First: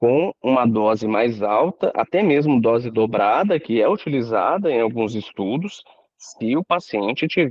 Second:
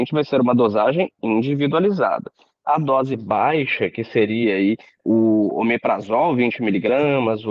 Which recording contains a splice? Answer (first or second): second